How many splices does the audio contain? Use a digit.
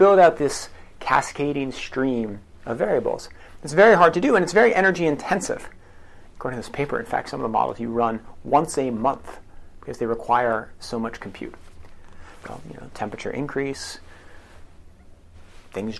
2